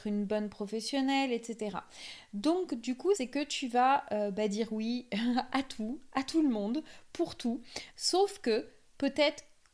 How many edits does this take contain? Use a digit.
2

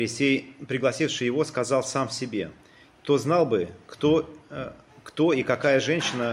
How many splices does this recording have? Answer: 1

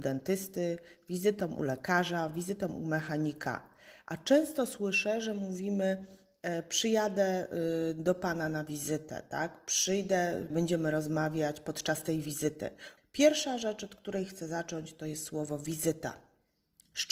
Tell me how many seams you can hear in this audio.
2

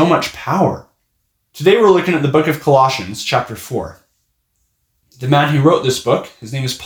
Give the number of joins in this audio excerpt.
1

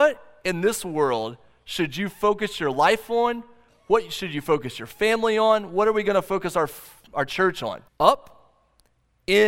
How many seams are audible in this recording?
1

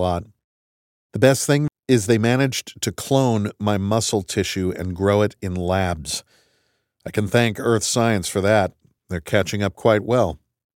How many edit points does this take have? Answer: 2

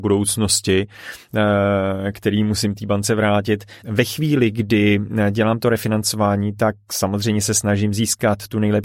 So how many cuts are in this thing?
2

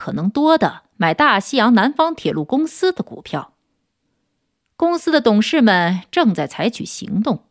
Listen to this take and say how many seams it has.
0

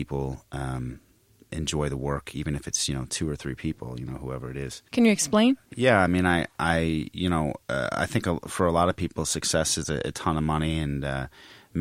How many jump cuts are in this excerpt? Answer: 1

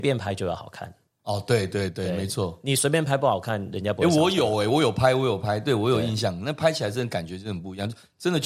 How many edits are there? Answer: 0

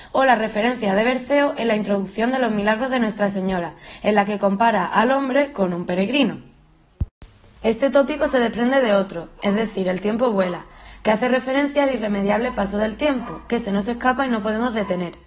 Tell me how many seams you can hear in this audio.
2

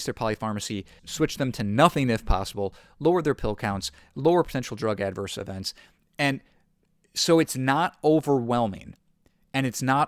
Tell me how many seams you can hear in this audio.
1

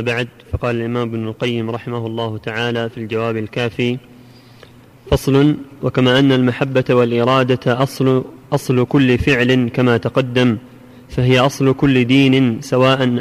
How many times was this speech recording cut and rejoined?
0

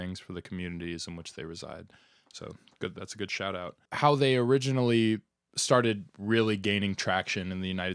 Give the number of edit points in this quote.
1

